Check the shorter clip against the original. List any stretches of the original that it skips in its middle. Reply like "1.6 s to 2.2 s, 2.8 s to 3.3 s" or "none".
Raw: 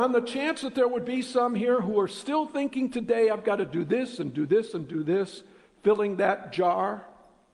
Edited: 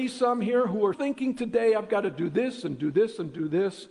2.1 s to 2.5 s